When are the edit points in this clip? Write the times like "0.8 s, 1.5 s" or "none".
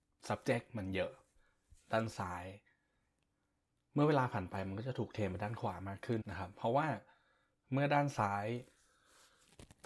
6.2 s